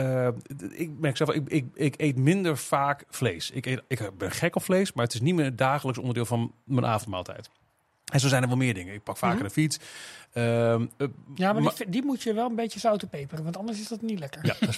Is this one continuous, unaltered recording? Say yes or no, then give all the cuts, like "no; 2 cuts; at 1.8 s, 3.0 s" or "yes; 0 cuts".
yes; 0 cuts